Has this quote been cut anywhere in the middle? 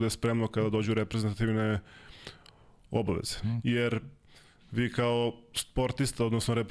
yes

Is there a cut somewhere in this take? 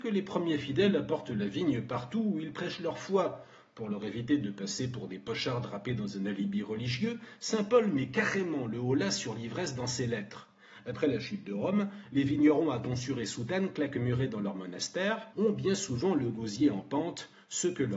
yes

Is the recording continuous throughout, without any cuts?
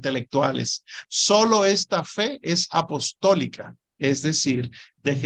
no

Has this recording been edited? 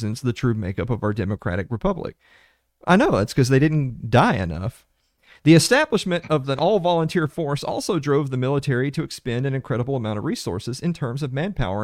no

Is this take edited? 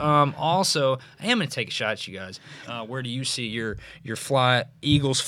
yes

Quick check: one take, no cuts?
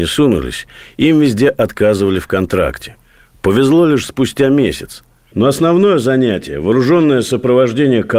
no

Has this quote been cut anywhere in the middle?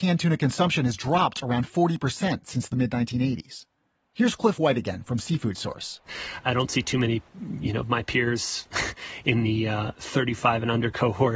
yes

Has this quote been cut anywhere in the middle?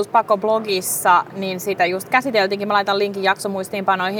no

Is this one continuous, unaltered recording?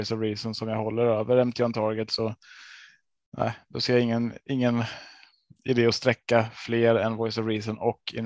yes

